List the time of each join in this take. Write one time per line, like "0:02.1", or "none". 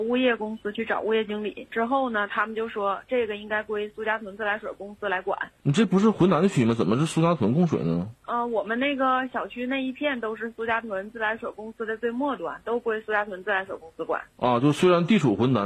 none